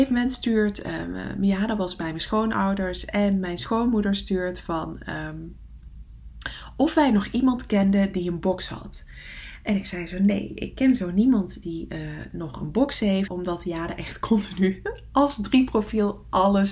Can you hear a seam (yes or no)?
yes